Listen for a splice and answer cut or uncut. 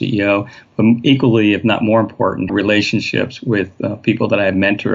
cut